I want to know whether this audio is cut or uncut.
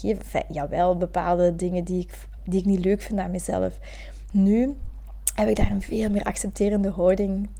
cut